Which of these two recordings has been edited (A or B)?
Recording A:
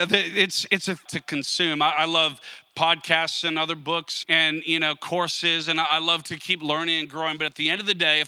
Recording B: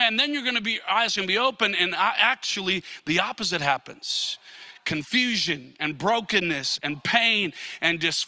A